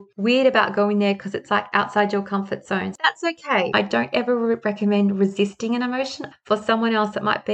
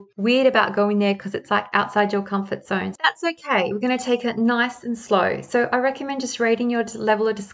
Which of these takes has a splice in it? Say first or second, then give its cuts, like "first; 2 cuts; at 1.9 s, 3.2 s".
first; 2 cuts; at 3.7 s, 6.3 s